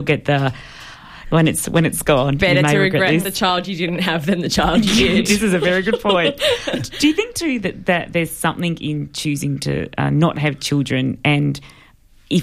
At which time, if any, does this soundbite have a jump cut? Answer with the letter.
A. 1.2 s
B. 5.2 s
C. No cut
A